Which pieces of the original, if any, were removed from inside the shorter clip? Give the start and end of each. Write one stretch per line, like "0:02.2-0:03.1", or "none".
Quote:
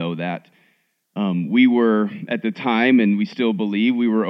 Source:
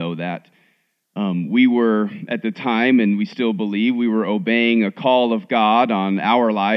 none